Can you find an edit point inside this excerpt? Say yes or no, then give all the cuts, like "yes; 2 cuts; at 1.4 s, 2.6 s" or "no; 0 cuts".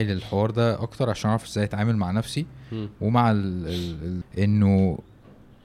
yes; 1 cut; at 4.2 s